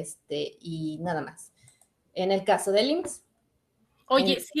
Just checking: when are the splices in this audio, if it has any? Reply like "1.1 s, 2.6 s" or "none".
none